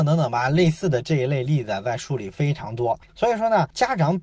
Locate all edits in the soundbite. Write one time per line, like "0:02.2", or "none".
0:03.1